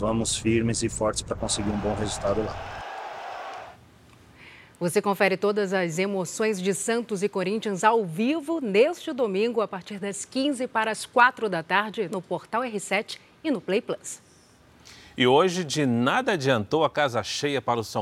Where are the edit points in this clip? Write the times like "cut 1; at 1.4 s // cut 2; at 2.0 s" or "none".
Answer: cut 1; at 12.1 s